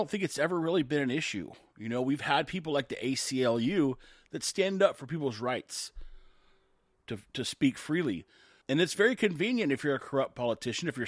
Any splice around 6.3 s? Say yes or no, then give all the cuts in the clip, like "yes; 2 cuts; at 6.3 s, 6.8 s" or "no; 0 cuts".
no; 1 cut; at 8.6 s